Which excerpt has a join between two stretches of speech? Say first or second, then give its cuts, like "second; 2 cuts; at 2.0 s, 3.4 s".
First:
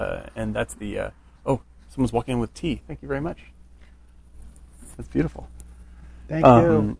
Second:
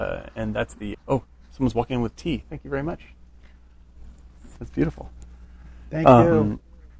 second; 1 cut; at 0.9 s